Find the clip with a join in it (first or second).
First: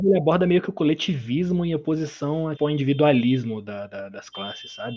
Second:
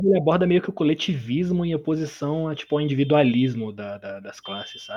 first